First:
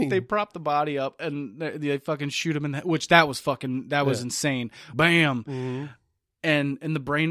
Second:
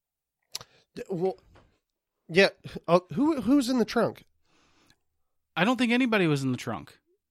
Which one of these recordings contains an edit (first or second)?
first